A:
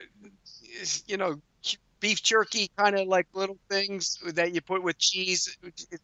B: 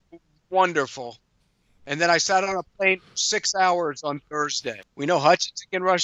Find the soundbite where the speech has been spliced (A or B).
B